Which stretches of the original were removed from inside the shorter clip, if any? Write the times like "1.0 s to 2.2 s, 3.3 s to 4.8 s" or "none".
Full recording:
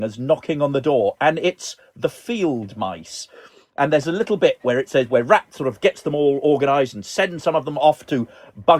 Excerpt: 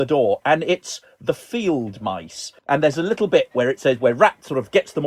3.3 s to 3.7 s